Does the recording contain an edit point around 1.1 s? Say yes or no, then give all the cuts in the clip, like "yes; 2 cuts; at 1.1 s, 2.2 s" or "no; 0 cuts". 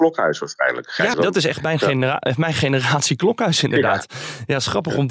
yes; 1 cut; at 1.1 s